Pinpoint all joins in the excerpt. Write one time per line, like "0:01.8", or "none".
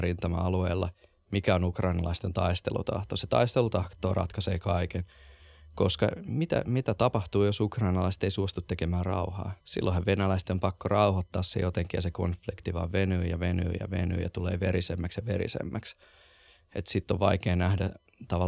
0:09.6

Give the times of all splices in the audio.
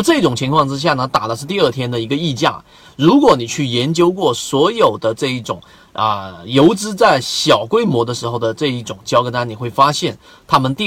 none

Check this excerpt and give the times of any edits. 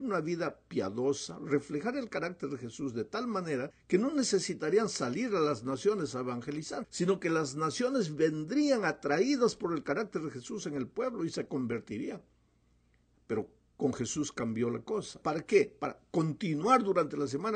0:15.2

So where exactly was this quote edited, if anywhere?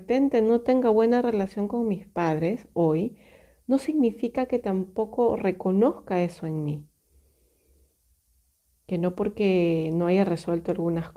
none

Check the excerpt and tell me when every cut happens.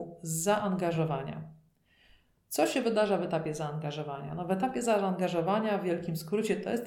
none

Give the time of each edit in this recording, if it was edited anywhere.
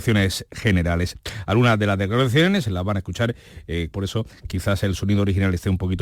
0:03.9

